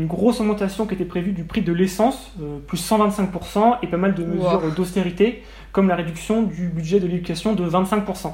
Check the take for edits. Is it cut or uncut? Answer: uncut